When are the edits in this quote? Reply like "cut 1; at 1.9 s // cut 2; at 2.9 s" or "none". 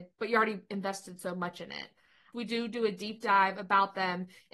cut 1; at 2.3 s